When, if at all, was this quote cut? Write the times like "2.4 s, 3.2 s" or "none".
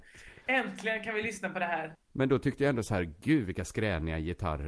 1.9 s